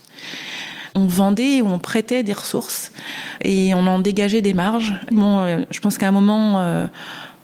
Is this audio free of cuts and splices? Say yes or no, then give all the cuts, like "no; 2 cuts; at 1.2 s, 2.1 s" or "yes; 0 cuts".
no; 1 cut; at 5.1 s